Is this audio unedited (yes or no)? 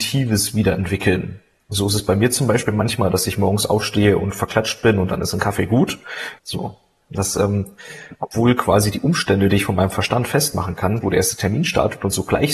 no